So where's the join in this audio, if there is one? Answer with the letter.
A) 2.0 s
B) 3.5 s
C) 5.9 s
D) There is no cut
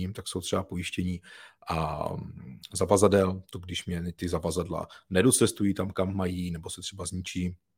D